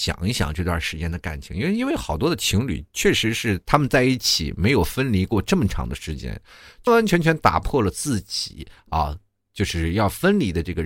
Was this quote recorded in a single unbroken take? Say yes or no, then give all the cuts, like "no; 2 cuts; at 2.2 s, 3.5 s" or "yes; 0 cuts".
no; 1 cut; at 6.9 s